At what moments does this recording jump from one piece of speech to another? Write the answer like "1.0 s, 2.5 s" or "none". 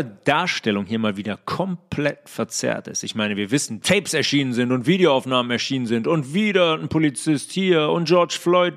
3.8 s